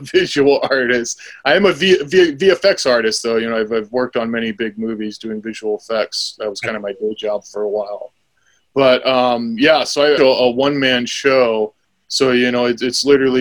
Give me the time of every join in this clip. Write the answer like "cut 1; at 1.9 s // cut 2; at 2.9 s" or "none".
cut 1; at 10.2 s